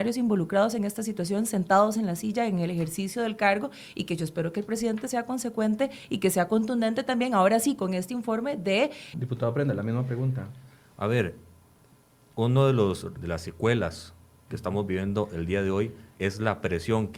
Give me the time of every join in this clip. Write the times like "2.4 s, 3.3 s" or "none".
9.1 s, 13.2 s